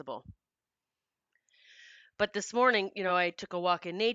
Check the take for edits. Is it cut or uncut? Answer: uncut